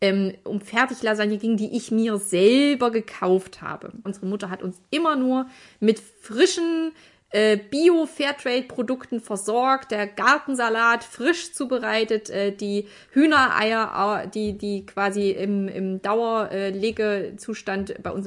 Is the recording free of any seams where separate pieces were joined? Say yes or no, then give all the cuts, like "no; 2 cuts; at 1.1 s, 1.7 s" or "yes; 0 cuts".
no; 1 cut; at 4.1 s